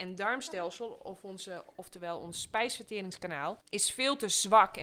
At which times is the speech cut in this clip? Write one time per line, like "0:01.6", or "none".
0:03.6